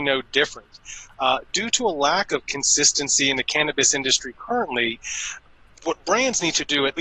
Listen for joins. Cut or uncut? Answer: uncut